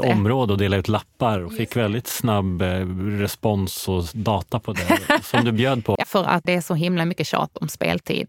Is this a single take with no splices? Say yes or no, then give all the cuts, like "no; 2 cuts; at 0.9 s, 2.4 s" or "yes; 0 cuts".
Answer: no; 1 cut; at 6.0 s